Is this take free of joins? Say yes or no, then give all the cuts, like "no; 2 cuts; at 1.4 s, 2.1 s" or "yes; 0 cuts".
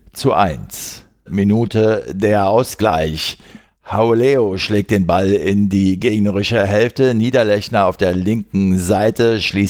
no; 1 cut; at 1.3 s